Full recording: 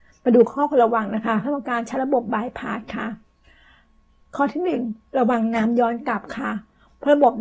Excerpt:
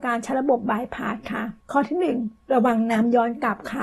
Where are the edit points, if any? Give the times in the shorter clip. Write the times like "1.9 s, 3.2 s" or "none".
1.6 s